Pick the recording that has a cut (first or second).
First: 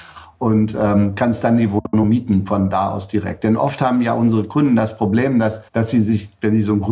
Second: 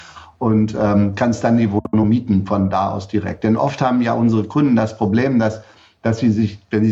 first